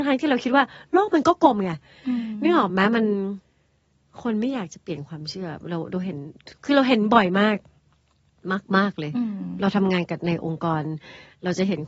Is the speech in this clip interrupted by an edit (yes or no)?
no